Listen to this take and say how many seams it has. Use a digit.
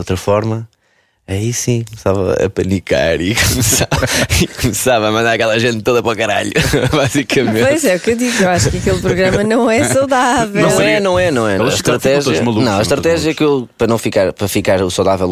1